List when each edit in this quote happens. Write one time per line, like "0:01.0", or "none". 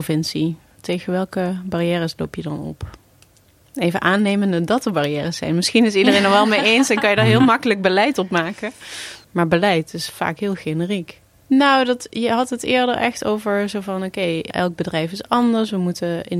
0:09.2
0:11.4

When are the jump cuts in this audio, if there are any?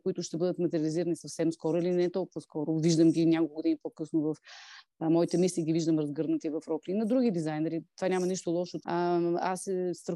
0:08.8

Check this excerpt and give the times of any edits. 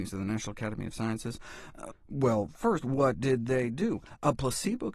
0:01.9

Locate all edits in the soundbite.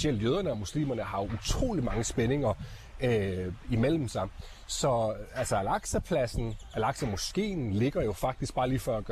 none

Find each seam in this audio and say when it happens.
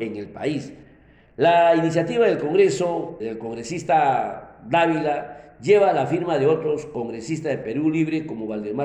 0:03.2

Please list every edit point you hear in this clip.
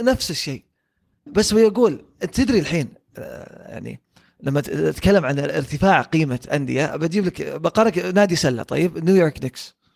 0:01.3

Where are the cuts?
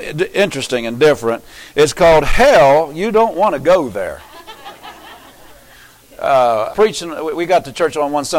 0:06.7

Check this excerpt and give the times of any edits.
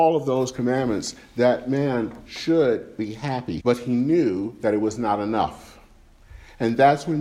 0:03.6

